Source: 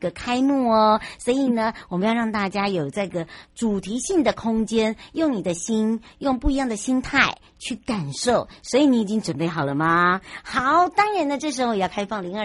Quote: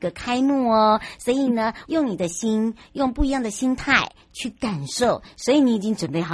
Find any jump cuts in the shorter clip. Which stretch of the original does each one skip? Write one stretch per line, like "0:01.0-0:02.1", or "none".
0:01.8-0:05.1